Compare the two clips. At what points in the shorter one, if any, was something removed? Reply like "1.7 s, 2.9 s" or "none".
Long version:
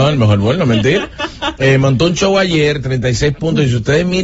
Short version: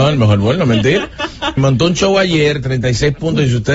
1.6 s

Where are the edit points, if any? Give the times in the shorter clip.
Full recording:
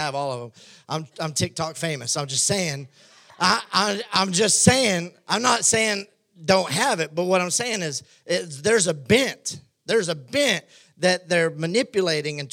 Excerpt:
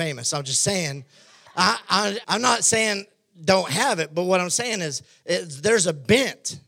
2.2 s

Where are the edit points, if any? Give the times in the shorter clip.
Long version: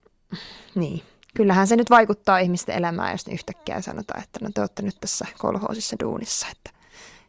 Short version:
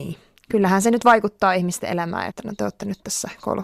2.3 s

